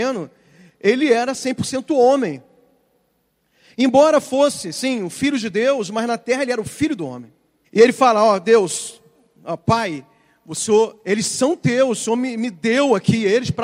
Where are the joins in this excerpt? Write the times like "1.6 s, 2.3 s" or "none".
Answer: 7.6 s